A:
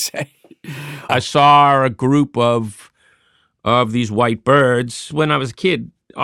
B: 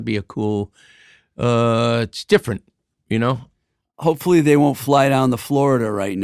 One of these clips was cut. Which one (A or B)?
A